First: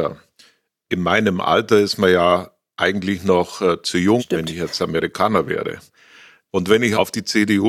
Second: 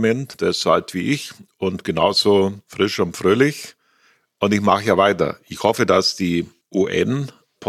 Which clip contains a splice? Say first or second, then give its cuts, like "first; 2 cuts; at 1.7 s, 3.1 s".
first; 2 cuts; at 4.2 s, 5.9 s